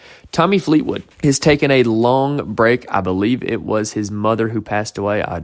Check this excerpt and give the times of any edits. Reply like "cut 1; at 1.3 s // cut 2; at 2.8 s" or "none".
cut 1; at 1.1 s